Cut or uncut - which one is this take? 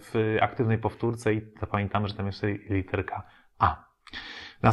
uncut